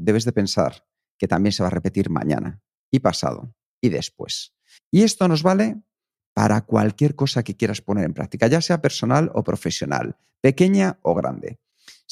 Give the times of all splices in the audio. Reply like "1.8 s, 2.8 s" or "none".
4.8 s

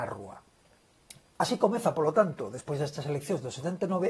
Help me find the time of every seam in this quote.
none

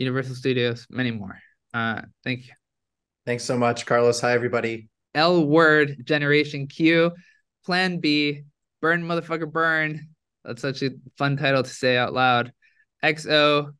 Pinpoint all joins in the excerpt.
2.1 s, 5.1 s

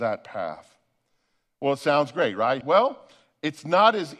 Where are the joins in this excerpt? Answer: 2.6 s

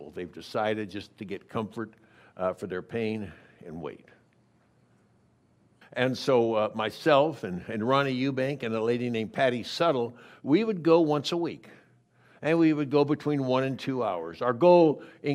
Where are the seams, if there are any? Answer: 5.8 s

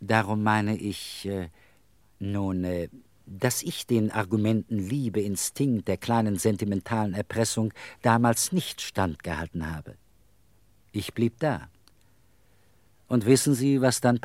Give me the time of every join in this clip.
none

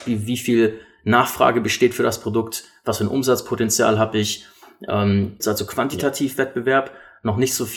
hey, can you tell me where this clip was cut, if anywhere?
5.4 s

